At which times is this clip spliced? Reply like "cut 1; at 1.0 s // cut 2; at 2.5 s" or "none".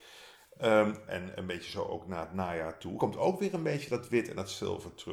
cut 1; at 1.1 s